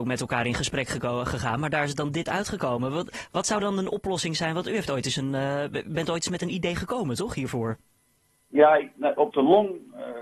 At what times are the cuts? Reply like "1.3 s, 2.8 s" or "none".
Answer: none